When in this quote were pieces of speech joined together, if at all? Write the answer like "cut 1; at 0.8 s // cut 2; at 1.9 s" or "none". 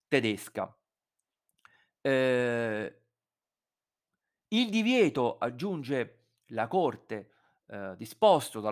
none